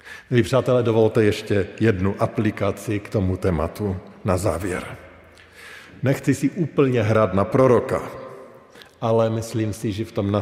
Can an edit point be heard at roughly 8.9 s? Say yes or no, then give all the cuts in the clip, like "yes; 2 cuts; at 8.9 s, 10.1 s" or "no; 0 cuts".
no; 0 cuts